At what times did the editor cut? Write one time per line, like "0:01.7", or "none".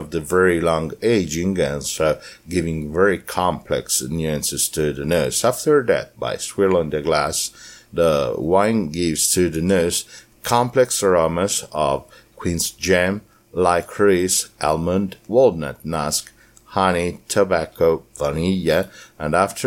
none

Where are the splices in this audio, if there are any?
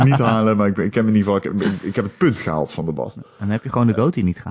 none

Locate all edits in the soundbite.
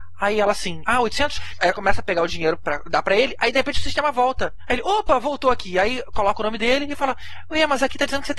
none

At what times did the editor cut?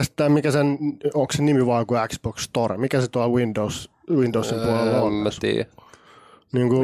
none

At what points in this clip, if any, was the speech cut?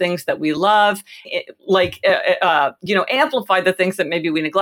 0:01.2

